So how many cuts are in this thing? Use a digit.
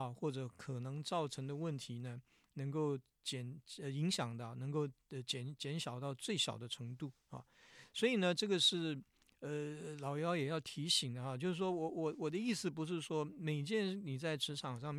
0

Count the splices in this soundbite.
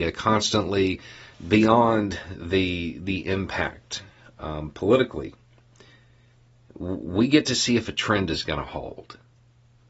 1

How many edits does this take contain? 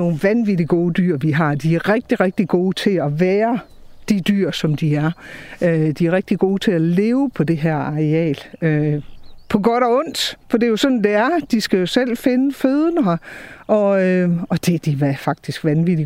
1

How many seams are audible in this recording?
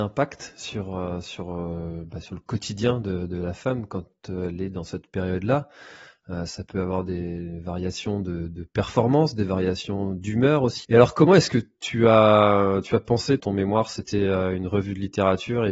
2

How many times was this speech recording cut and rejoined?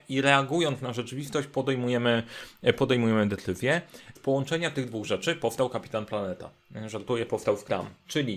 2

